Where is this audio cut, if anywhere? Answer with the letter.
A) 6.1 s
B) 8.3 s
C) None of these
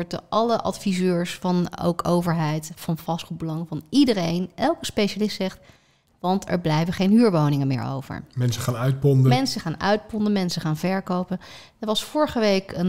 A